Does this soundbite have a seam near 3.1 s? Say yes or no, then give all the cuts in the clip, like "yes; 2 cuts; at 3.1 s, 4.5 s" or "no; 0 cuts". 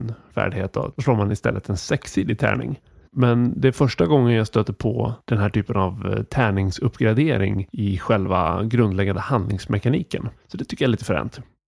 yes; 2 cuts; at 0.9 s, 3.1 s